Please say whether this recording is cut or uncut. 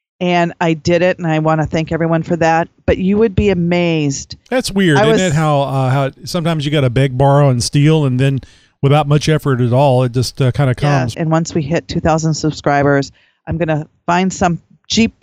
cut